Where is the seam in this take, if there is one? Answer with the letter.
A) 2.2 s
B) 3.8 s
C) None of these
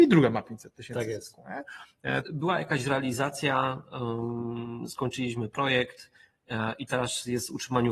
A